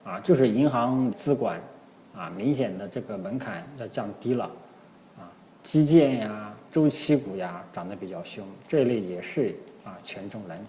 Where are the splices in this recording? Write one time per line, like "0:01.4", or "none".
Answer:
0:01.1
0:05.4